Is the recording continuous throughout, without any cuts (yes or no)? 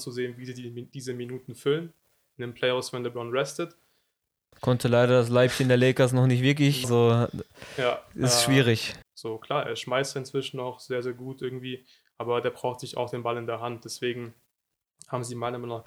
no